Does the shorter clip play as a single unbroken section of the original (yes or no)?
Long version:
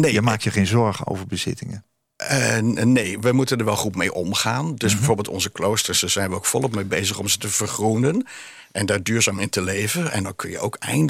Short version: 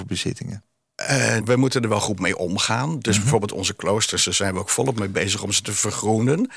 no